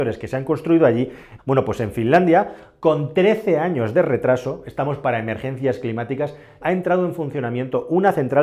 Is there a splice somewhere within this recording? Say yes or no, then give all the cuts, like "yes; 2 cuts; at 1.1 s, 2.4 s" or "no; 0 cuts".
yes; 2 cuts; at 1.4 s, 6.6 s